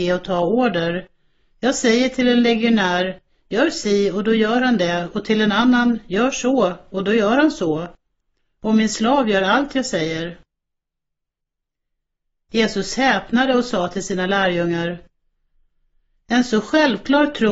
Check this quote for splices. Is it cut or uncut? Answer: uncut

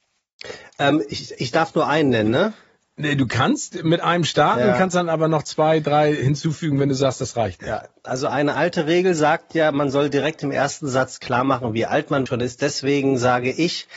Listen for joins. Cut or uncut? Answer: cut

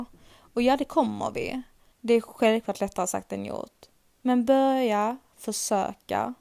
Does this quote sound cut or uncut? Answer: cut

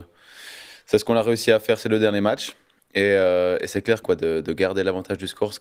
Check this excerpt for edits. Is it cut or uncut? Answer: cut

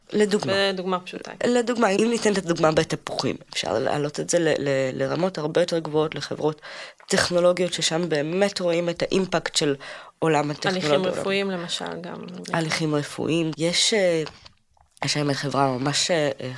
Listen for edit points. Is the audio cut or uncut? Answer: uncut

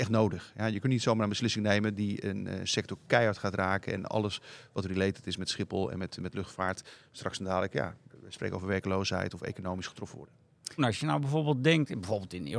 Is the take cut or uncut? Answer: cut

